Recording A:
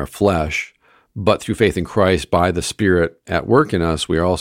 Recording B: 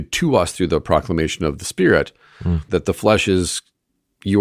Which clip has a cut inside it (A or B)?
B